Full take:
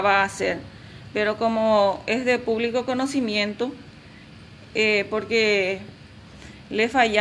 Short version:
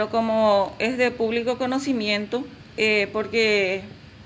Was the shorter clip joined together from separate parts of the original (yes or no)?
yes